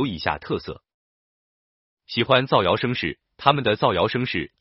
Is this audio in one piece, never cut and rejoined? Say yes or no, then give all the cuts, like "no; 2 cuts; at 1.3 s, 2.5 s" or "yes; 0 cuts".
yes; 0 cuts